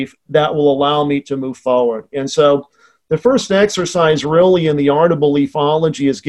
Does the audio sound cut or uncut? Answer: uncut